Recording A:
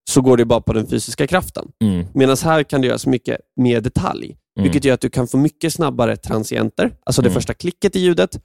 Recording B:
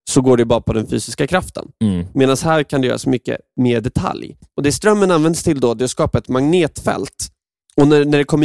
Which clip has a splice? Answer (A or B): B